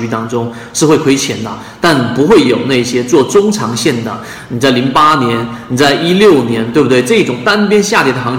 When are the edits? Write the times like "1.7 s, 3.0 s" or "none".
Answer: none